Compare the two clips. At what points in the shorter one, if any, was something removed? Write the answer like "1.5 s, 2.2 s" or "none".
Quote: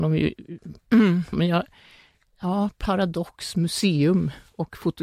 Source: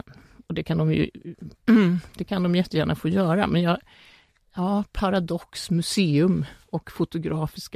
1.3 s